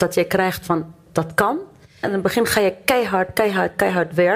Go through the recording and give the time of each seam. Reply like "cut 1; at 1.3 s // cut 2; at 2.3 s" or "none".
cut 1; at 2.0 s